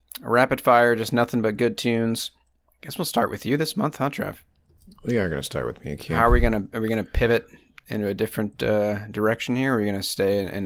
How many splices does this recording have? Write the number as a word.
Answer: zero